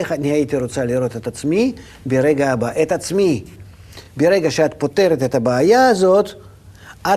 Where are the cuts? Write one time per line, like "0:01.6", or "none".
none

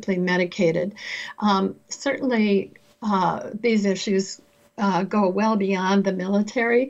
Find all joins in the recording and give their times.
none

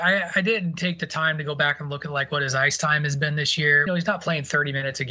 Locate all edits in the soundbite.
0:03.9

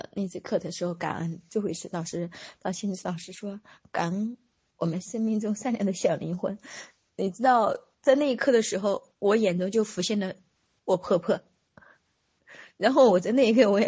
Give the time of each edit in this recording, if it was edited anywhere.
none

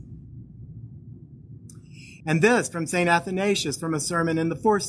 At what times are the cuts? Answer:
0:02.2

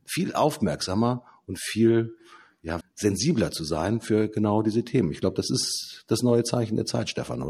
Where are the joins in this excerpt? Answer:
0:02.8

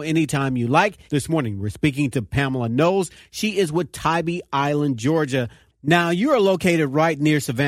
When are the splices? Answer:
0:01.1

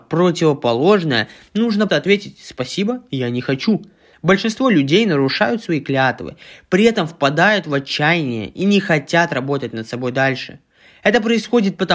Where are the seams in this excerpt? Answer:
0:01.9
0:04.1

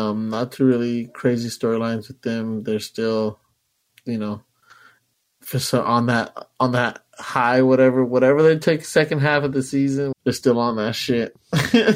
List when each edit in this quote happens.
0:10.1

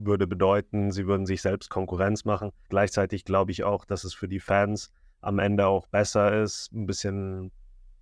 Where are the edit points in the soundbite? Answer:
0:02.7

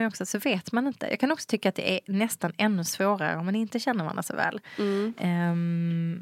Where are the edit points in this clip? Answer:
none

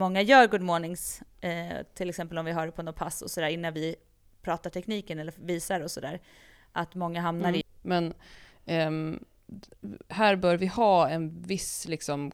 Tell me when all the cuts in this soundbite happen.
0:07.6

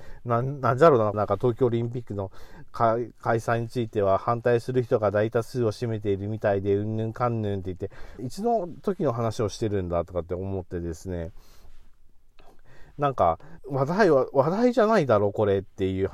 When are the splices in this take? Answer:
0:01.1
0:08.2
0:13.6

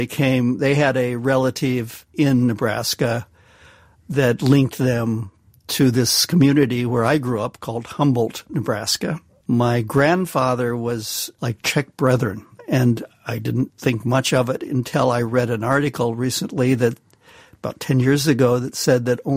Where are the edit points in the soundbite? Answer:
0:09.4

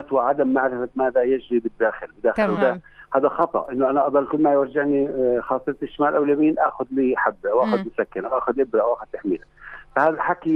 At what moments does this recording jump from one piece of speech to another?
0:02.6

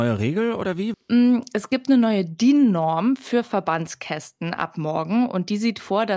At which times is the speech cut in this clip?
0:00.9

